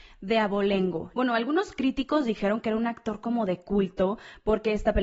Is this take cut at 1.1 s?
yes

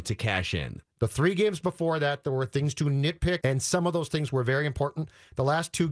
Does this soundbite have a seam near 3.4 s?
yes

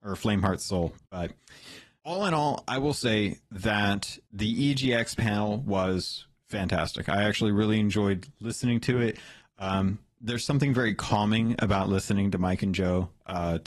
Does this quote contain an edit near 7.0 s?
no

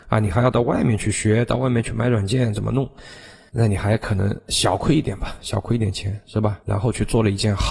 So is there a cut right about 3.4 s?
no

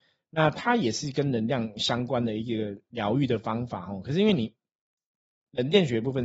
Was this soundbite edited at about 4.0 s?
no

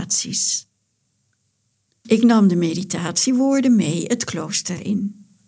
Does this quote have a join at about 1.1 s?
no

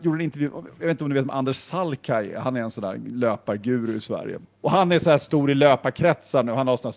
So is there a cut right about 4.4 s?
yes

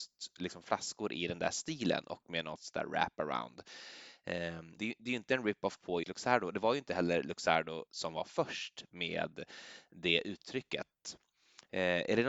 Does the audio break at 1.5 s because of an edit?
no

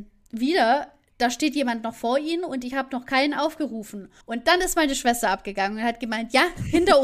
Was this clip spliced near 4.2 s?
yes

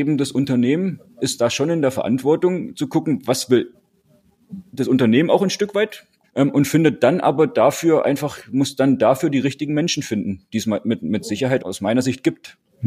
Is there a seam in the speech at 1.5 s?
no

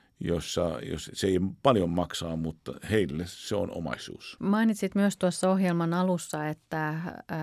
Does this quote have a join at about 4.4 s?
yes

